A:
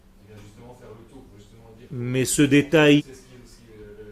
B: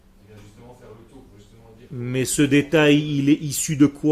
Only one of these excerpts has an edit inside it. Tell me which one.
A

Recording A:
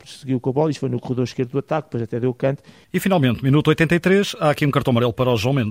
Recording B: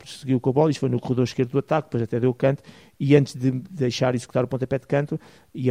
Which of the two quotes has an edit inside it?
A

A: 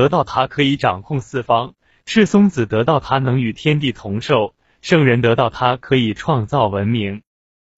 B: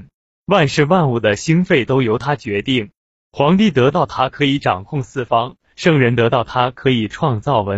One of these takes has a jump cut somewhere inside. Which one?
B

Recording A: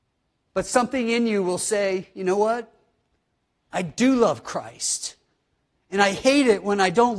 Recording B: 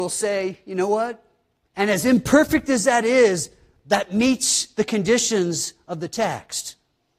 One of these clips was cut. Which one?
B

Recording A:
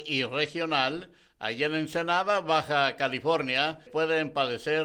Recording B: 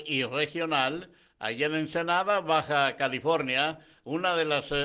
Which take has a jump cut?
A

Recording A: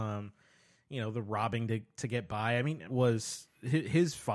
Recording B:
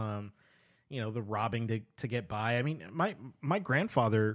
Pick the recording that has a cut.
A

